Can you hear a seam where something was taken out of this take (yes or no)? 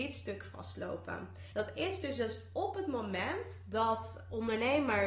yes